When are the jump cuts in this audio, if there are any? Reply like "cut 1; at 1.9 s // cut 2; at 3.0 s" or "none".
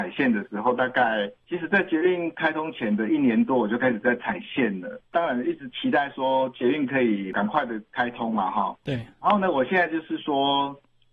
cut 1; at 8.8 s